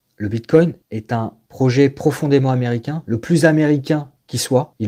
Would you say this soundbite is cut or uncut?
uncut